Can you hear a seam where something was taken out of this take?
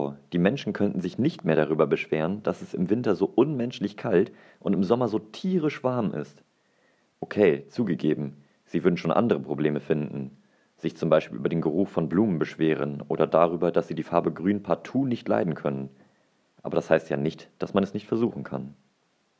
no; 0 cuts

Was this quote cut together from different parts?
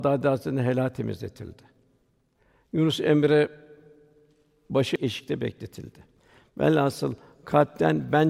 no; 0 cuts

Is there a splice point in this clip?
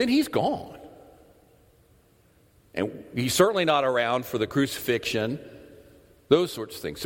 no; 0 cuts

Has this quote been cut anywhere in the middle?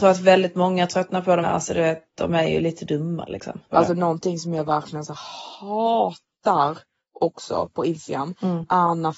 yes; 2 cuts; at 1.4 s, 3.7 s

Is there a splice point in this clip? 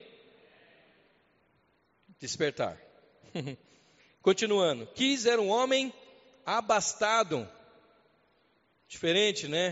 no; 0 cuts

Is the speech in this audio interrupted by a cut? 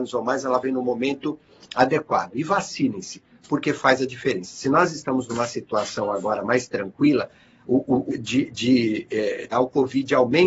yes; 2 cuts; at 8.1 s, 9.5 s

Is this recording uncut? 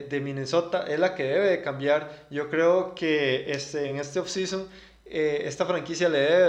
yes; 0 cuts

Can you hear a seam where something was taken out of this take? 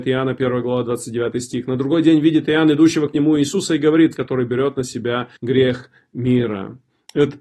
yes; 2 cuts; at 4.1 s, 5.4 s

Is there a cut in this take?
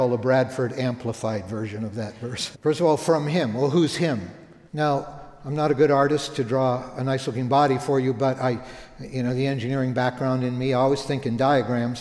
yes; 2 cuts; at 2.5 s, 4.7 s

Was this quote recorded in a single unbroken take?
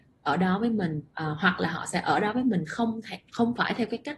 no; 1 cut; at 1.1 s

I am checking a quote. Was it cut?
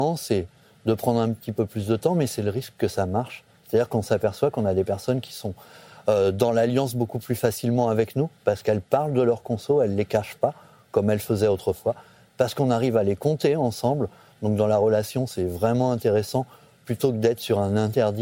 no; 0 cuts

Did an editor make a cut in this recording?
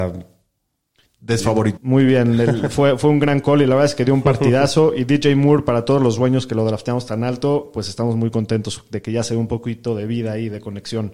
yes; 1 cut; at 1.8 s

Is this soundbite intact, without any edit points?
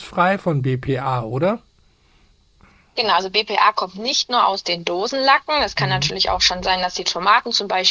yes; 0 cuts

